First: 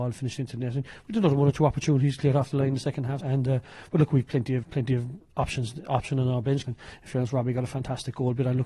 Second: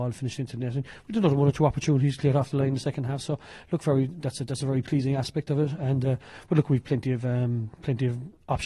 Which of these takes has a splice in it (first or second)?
first